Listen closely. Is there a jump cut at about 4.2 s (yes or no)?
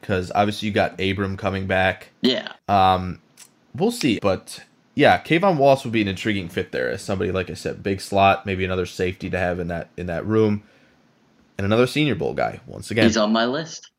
yes